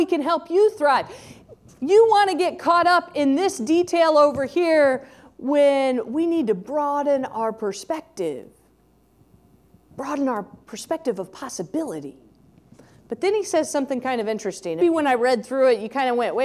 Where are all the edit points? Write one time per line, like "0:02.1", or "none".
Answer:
0:14.8